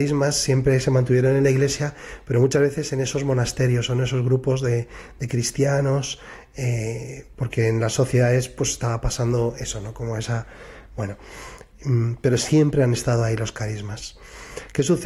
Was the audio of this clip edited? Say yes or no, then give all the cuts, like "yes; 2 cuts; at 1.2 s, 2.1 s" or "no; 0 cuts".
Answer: no; 0 cuts